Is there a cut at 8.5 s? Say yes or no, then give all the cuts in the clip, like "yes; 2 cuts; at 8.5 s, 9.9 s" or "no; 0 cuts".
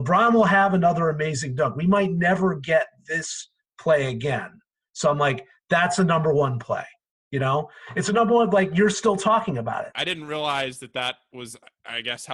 no; 1 cut; at 9.9 s